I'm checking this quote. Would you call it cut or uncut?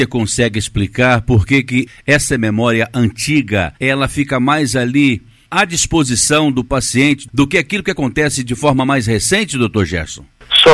cut